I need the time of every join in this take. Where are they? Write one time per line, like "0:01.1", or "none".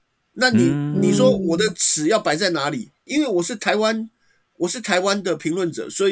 0:03.1